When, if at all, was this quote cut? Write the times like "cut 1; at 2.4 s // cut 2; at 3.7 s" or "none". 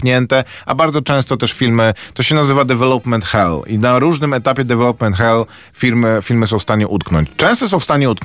none

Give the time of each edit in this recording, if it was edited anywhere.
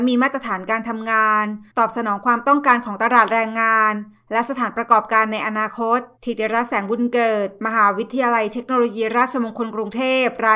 cut 1; at 6.1 s

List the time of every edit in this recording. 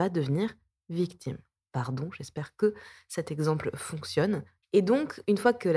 cut 1; at 1.7 s // cut 2; at 4.6 s

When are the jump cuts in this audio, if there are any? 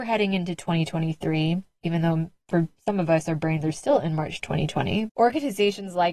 cut 1; at 5.1 s

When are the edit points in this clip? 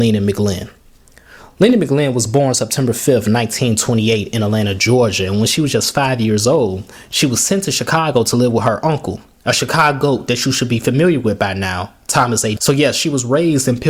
cut 1; at 12.6 s

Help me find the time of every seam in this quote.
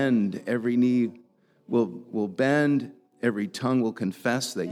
none

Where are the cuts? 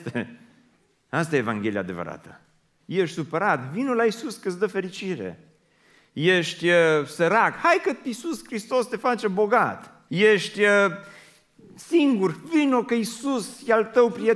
cut 1; at 2.8 s // cut 2; at 10.1 s

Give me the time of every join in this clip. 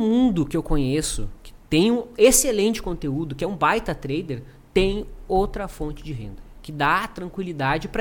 none

